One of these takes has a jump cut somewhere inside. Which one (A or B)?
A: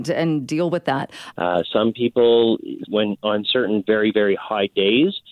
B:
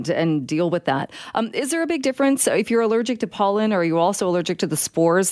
A